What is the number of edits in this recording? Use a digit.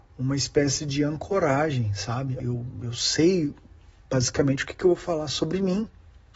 1